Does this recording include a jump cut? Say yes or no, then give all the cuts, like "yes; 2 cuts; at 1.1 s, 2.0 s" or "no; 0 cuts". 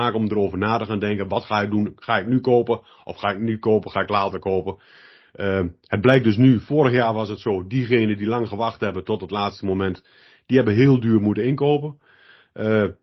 no; 0 cuts